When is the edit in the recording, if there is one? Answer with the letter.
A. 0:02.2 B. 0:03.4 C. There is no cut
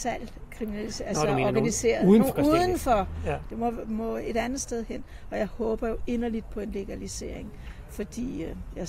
B